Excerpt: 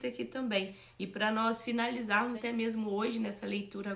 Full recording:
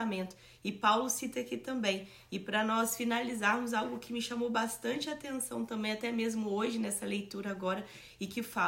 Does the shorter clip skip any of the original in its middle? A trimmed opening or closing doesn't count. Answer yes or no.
yes